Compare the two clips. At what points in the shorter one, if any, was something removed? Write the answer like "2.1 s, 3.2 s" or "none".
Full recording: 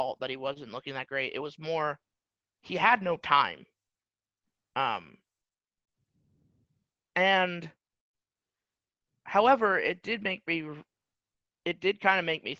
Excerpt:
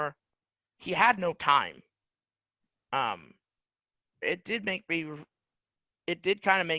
4.2 s